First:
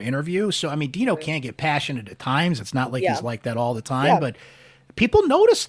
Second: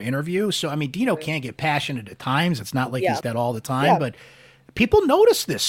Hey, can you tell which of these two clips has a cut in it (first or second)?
second